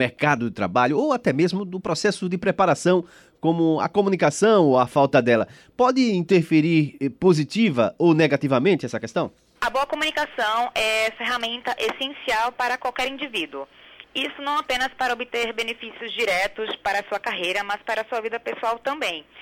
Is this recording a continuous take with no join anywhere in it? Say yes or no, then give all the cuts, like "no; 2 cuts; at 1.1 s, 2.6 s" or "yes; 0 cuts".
yes; 0 cuts